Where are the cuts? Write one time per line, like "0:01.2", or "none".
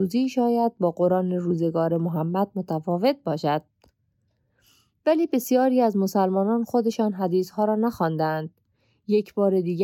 none